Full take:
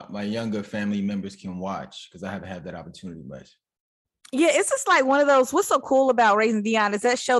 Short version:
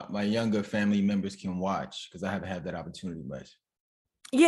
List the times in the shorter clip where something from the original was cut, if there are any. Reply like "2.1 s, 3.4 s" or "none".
none